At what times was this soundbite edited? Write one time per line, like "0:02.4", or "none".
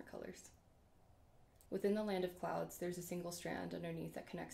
0:01.7